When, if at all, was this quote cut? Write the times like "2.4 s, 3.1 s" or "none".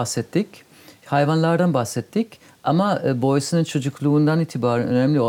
none